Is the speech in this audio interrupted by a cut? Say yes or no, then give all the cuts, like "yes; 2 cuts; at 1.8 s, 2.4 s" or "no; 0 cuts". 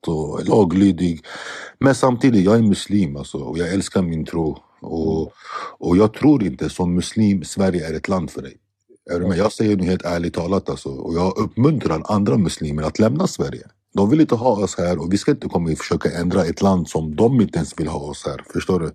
no; 0 cuts